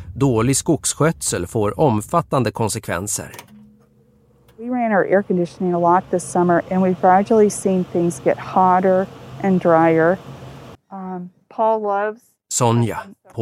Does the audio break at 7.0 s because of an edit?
yes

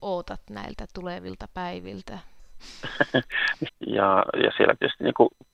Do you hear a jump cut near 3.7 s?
yes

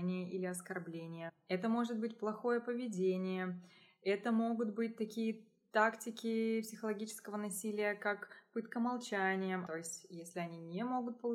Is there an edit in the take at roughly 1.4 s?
no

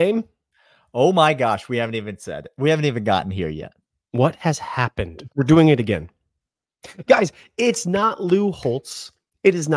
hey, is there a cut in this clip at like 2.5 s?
no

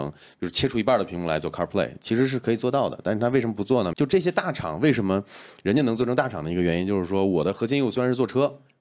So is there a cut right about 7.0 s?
no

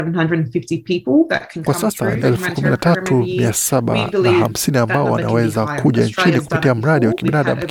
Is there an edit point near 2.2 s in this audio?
yes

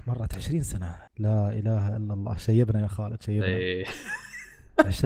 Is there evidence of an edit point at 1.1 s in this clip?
yes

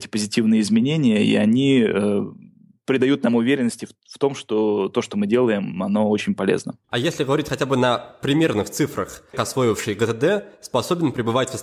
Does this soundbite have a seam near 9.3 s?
yes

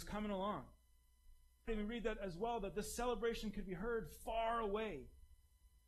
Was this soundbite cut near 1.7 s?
yes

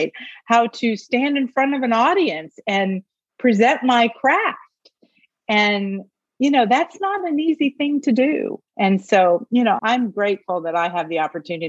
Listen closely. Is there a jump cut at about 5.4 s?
no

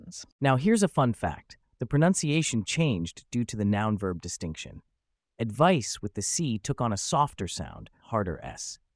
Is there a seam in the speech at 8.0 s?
yes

